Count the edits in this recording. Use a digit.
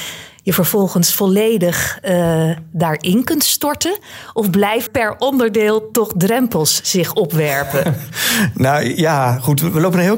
1